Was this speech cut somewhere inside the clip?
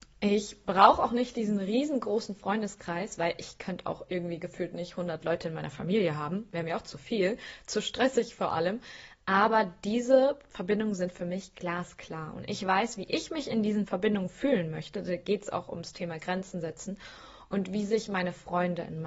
no; 0 cuts

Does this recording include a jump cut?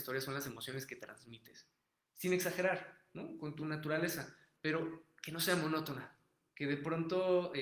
no; 0 cuts

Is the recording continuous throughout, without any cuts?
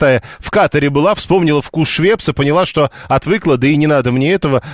no; 1 cut; at 1.2 s

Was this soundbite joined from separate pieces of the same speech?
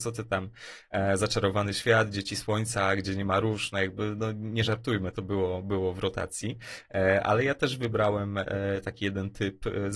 no; 0 cuts

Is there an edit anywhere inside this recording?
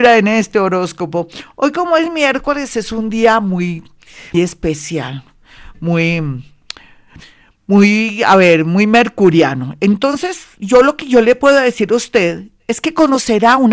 yes; 1 cut; at 4.3 s

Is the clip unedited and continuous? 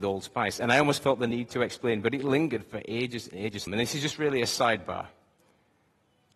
no; 1 cut; at 3.7 s

